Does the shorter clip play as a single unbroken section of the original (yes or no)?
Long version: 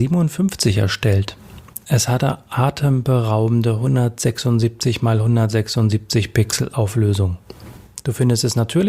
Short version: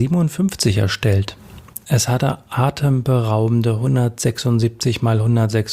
yes